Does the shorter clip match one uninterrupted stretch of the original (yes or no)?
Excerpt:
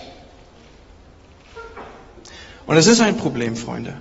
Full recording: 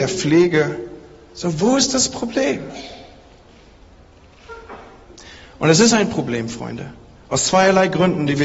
yes